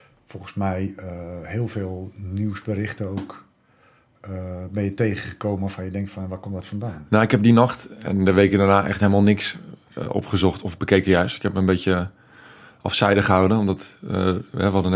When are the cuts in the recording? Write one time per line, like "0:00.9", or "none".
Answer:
none